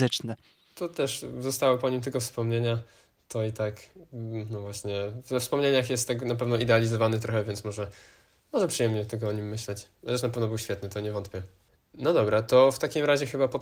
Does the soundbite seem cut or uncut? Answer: uncut